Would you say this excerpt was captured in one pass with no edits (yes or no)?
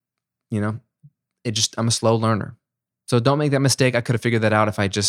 yes